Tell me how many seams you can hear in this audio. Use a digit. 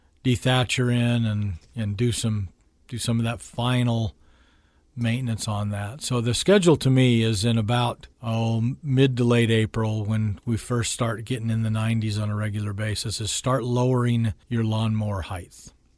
2